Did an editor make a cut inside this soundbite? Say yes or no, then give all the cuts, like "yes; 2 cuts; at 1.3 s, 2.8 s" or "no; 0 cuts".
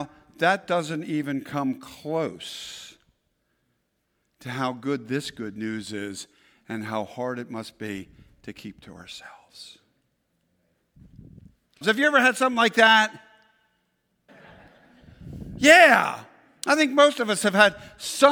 yes; 2 cuts; at 11.8 s, 14.3 s